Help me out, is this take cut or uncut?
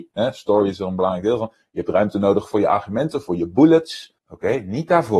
cut